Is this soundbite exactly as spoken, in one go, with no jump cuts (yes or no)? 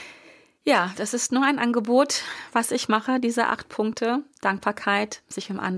no